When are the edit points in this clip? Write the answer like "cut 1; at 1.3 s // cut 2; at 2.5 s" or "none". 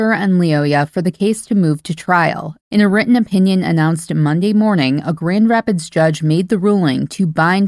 cut 1; at 2.6 s